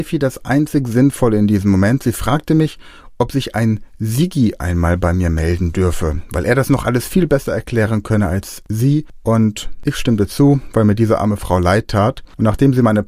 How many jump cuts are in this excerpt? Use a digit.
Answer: 0